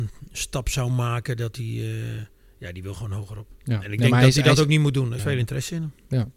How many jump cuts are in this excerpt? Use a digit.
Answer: 1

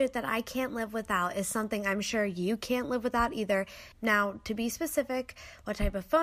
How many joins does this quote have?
1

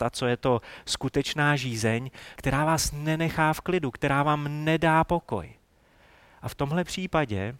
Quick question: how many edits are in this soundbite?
1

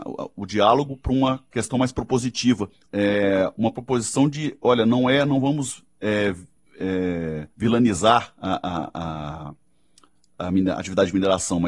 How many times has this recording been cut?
2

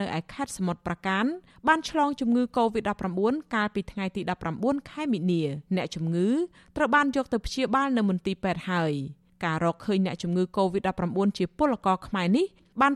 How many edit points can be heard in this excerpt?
1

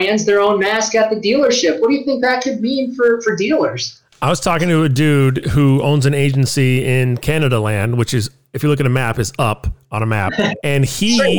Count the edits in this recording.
0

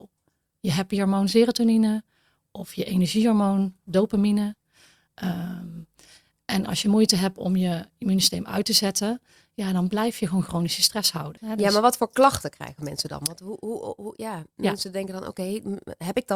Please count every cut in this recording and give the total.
1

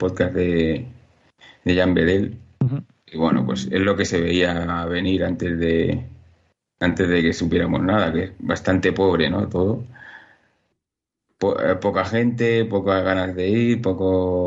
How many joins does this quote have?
0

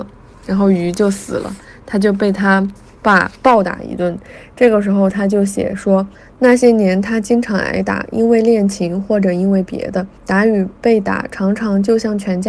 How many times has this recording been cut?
1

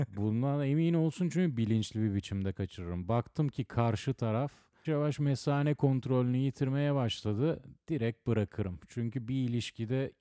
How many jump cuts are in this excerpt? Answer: 1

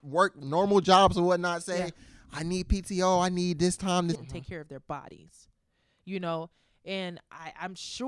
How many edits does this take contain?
1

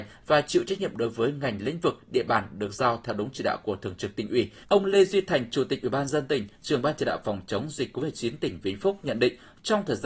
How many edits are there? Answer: 1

